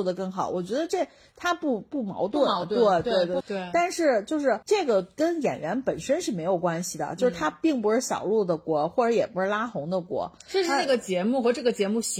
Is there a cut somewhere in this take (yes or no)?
yes